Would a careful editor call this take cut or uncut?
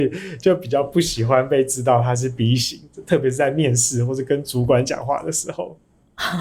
uncut